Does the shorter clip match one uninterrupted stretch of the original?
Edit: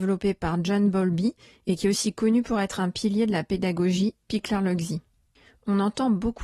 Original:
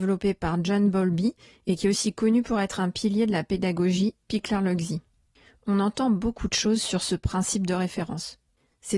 yes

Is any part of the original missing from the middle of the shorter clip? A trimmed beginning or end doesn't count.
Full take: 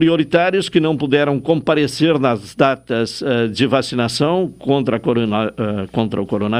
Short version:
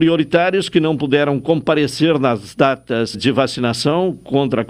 yes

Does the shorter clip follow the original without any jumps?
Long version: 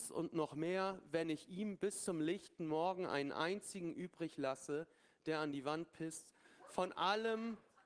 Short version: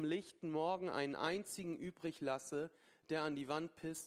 yes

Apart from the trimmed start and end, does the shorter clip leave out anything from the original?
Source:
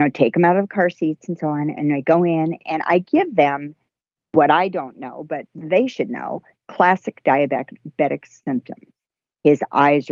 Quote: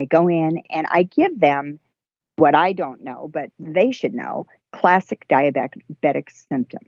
no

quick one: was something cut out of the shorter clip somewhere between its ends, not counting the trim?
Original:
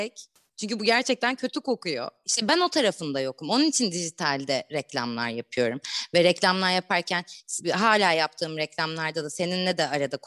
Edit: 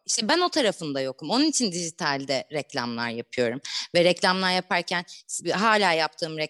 no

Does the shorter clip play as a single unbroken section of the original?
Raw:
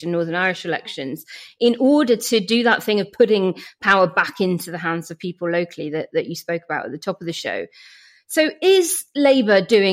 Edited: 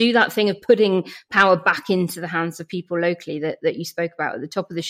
yes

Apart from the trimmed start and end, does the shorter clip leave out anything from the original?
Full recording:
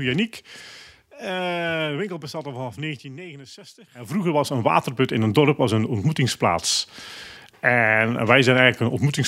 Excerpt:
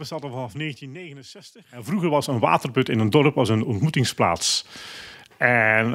no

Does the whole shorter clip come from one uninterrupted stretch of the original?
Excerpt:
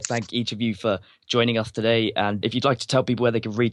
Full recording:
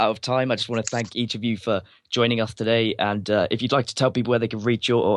no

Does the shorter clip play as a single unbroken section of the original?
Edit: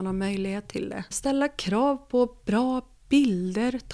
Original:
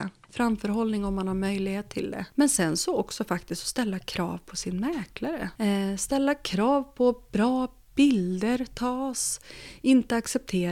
no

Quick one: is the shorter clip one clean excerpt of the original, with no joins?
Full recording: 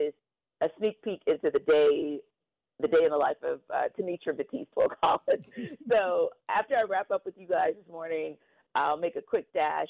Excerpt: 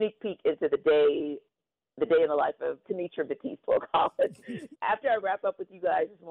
no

